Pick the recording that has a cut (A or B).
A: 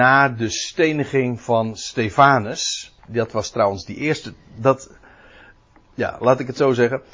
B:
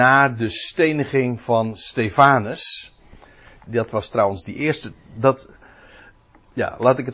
A